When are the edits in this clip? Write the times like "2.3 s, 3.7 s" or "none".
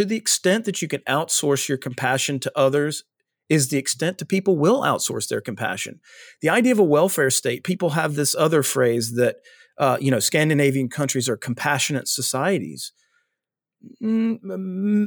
none

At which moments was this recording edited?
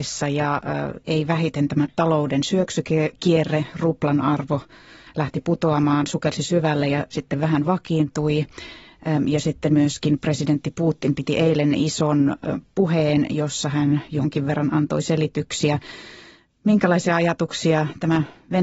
none

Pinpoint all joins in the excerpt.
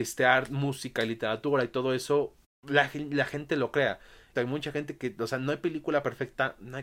4.3 s

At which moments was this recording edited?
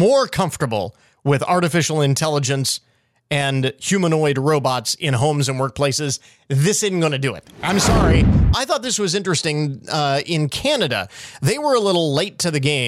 8.5 s

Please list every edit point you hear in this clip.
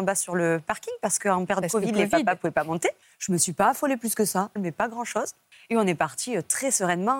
3.0 s, 4.6 s

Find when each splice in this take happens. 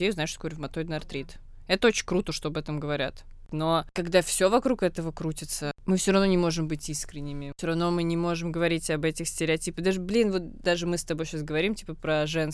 3.5 s, 10.6 s

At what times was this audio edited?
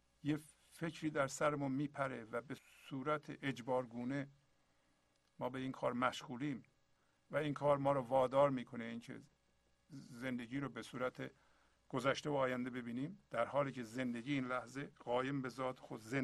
none

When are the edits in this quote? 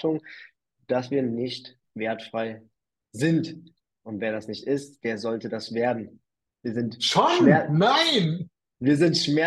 6.5 s

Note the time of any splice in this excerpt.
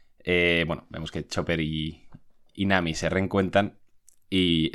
none

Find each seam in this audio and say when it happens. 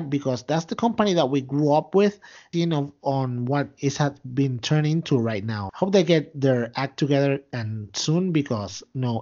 2.5 s, 5.7 s

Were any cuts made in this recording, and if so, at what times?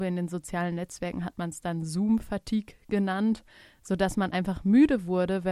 none

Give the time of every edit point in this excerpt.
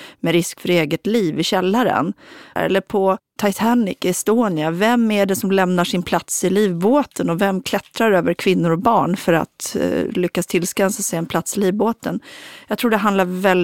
2.6 s

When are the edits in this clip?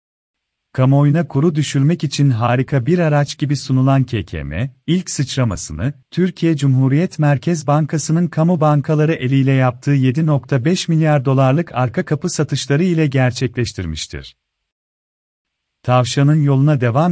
6.0 s

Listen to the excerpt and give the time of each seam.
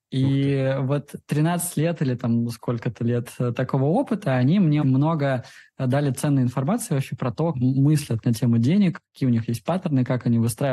4.8 s, 7.5 s

